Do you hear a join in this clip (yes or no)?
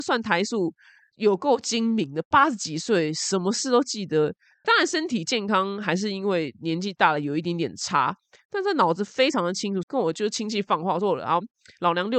yes